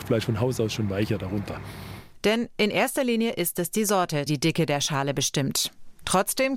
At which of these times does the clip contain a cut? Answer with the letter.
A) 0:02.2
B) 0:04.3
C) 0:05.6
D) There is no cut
B